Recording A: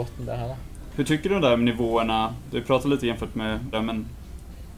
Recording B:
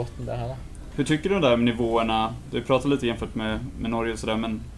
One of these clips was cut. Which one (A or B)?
A